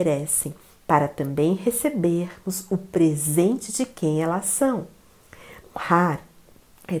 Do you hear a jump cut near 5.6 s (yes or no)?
yes